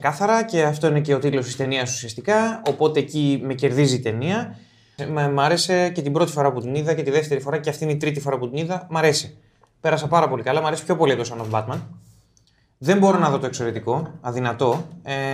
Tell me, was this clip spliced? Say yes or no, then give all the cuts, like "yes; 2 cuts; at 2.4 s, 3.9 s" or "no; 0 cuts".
yes; 1 cut; at 5.0 s